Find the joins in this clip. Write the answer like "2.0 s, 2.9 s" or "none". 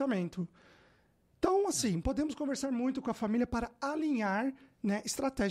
none

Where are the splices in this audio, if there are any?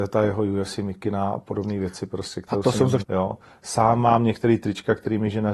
3.0 s

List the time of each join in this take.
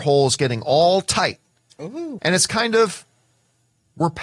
2.2 s

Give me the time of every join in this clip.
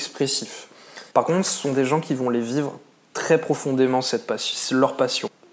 1.1 s

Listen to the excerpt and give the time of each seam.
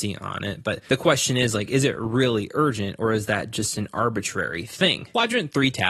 none

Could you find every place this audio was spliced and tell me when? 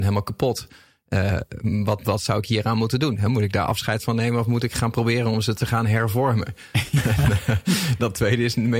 none

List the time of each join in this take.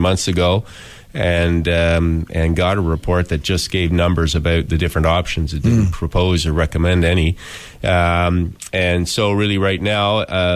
none

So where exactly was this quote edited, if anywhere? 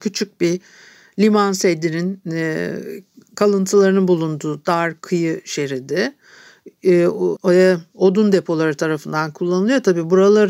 7.4 s

